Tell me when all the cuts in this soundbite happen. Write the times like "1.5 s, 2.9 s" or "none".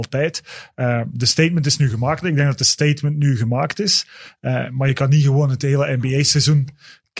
2.2 s